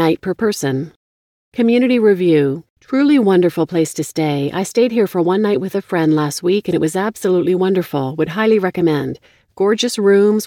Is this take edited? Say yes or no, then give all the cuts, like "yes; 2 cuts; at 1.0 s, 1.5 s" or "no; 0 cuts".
yes; 1 cut; at 2.7 s